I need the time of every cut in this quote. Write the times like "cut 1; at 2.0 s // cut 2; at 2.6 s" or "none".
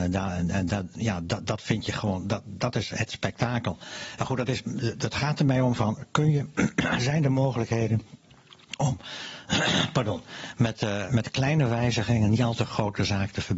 cut 1; at 4.2 s // cut 2; at 5.8 s // cut 3; at 11.1 s